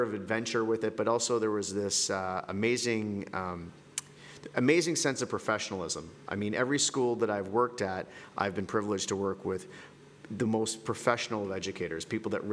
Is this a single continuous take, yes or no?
yes